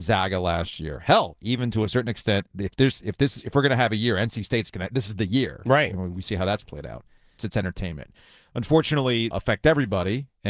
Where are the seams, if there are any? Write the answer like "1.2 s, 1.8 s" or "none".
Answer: 7.4 s, 9.3 s

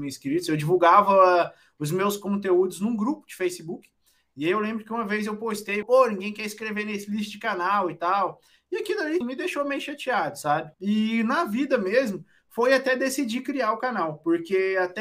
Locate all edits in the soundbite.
5.8 s, 9.2 s, 10.7 s

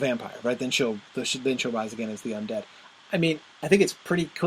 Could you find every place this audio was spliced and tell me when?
3.0 s

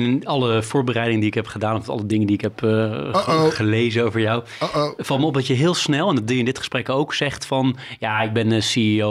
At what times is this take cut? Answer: none

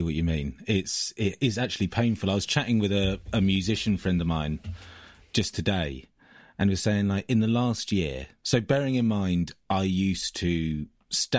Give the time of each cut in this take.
none

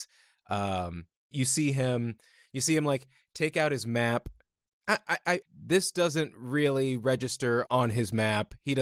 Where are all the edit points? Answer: 1.3 s, 5.4 s, 7.7 s

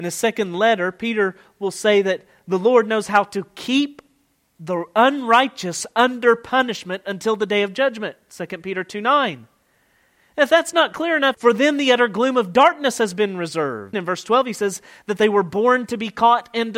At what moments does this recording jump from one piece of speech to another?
11.3 s, 13.9 s

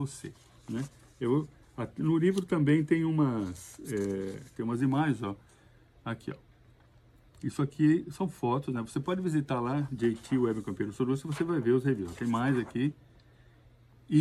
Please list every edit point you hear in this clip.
none

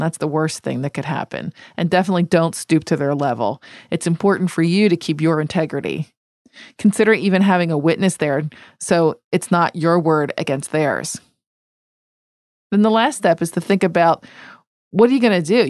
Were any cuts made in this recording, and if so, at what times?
none

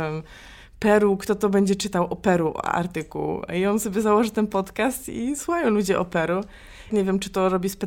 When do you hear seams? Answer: 6.9 s

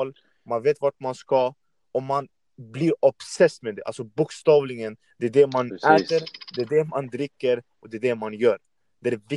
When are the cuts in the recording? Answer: none

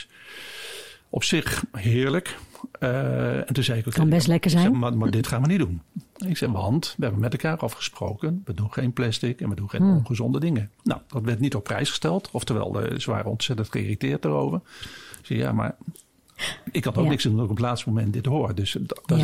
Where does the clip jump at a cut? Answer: none

